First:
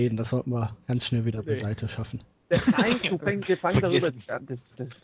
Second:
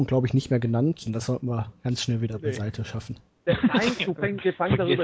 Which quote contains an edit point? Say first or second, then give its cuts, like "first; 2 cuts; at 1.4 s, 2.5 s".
second; 1 cut; at 1.1 s